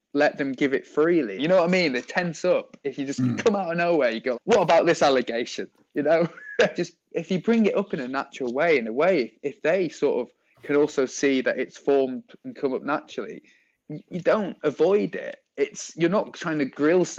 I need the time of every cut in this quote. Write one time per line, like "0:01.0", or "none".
0:01.4
0:04.3
0:06.7